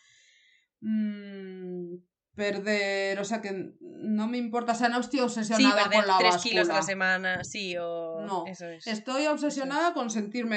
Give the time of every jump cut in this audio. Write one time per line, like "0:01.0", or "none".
none